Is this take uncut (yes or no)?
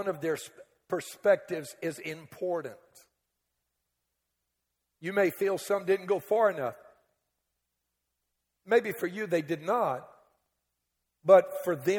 yes